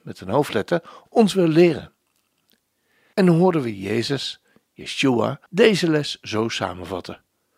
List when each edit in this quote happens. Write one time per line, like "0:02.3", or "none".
0:03.1
0:05.5